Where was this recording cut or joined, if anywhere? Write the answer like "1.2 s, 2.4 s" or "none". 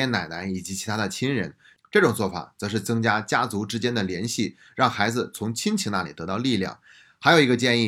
none